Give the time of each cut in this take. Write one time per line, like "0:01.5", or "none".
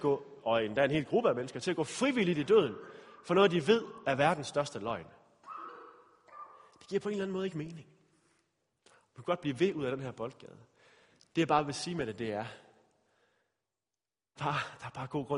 0:14.4